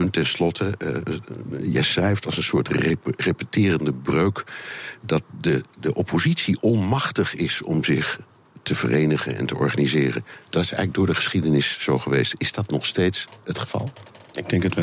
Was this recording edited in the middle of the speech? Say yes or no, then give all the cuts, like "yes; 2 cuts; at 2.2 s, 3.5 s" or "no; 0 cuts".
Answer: yes; 1 cut; at 5.3 s